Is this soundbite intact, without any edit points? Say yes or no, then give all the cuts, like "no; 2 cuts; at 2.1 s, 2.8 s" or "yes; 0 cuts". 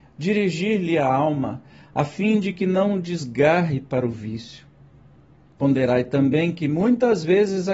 no; 1 cut; at 5.5 s